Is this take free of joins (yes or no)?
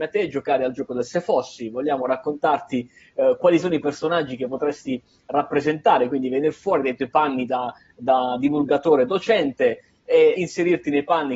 no